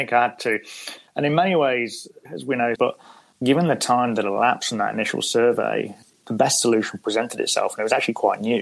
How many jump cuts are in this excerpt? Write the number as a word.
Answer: one